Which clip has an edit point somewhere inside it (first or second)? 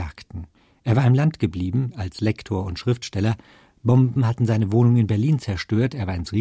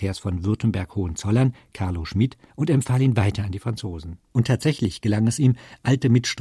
second